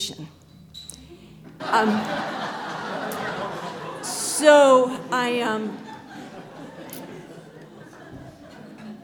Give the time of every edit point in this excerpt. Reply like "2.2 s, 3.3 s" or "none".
1.6 s